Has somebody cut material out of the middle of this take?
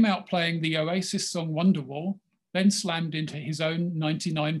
no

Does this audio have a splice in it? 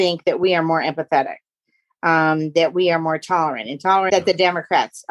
yes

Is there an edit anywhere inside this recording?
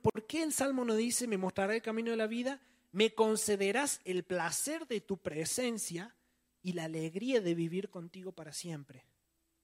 no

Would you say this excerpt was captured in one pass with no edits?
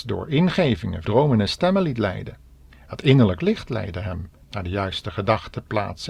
no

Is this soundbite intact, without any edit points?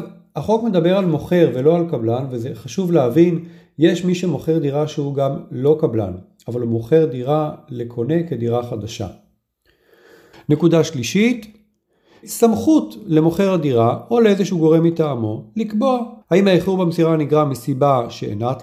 no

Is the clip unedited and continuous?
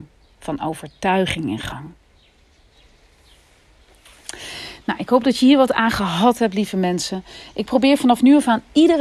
yes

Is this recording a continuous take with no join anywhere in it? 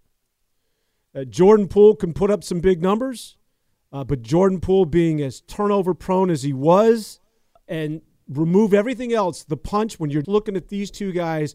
no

